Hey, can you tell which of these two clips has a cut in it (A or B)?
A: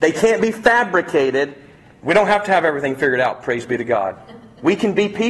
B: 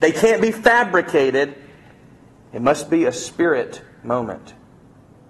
A